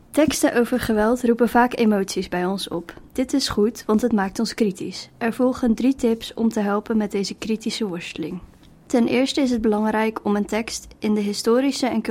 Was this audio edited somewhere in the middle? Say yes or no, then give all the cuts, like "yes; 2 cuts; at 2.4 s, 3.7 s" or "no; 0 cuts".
no; 0 cuts